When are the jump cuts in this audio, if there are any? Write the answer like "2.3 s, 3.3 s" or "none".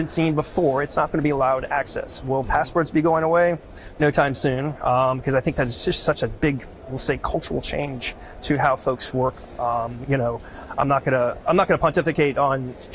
4.0 s

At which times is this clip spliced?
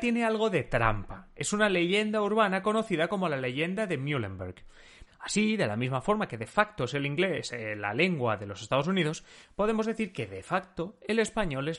5.1 s

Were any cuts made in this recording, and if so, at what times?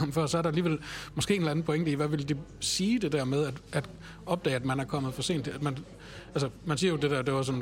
none

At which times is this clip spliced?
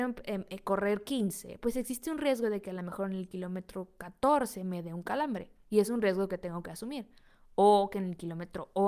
none

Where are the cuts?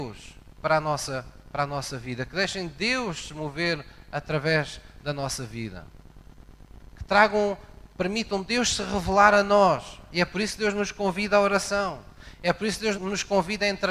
12.9 s

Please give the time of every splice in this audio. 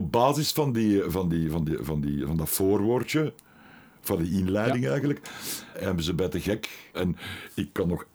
5.7 s, 6.9 s

